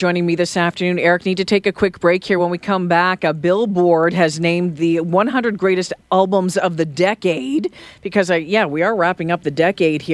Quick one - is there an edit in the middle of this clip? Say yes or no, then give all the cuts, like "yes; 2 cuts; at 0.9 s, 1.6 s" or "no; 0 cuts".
no; 0 cuts